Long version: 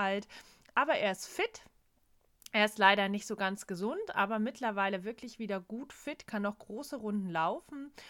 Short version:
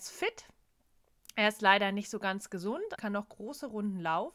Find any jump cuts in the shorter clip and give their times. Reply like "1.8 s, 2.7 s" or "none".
3.0 s